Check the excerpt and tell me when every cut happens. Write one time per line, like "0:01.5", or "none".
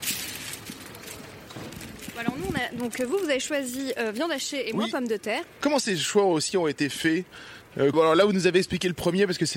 0:05.4
0:07.9